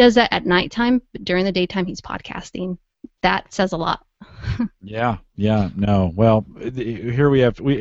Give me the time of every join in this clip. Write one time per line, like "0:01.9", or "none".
none